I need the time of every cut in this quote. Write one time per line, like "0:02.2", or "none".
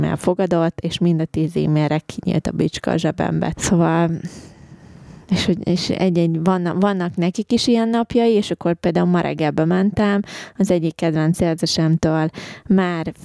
0:03.5